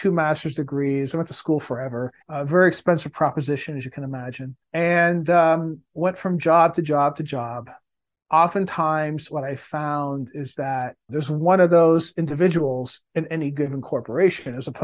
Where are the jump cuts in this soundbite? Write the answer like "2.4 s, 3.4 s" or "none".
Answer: 2.2 s, 4.7 s, 11.1 s